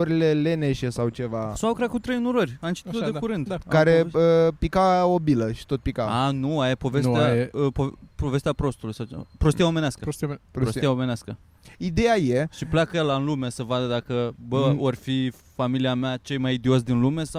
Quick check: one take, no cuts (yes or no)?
yes